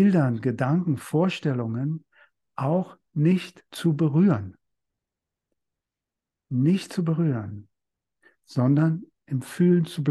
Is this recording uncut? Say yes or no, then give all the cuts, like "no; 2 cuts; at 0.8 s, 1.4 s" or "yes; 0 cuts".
yes; 0 cuts